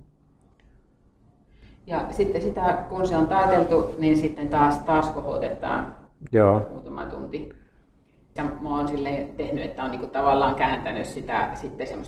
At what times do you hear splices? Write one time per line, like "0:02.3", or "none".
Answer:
0:08.4